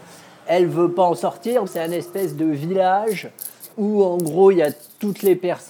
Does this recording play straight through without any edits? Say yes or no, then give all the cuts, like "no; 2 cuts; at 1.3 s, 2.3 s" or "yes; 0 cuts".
no; 2 cuts; at 1.7 s, 3.7 s